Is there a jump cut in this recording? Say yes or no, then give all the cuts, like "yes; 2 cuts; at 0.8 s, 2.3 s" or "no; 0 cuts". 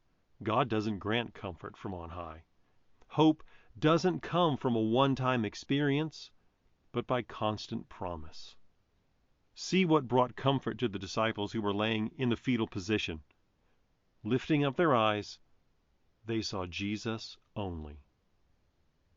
yes; 1 cut; at 3.0 s